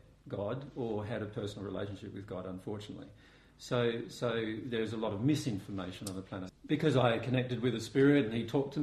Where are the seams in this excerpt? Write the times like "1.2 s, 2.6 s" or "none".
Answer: 6.5 s